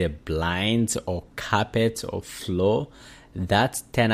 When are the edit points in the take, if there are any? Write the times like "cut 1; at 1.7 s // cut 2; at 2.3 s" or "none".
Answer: none